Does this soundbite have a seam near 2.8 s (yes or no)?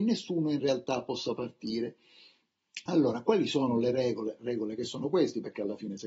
no